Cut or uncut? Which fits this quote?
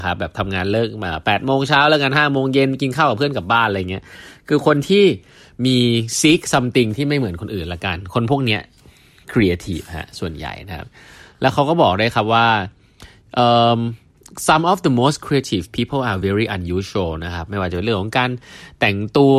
uncut